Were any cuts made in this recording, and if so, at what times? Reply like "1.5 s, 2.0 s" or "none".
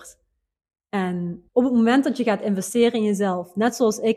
1.5 s